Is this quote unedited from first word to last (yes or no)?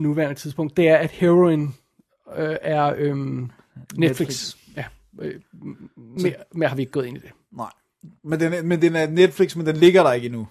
yes